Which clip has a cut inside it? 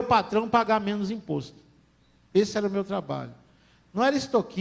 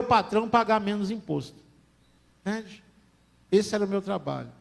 first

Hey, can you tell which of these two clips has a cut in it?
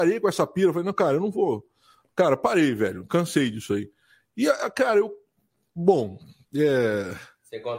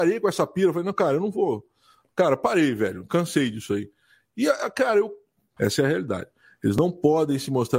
second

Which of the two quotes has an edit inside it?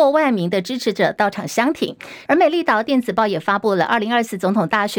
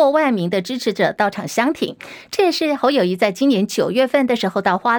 first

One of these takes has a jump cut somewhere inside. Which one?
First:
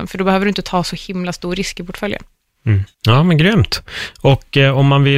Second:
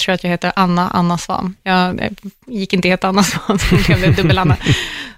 first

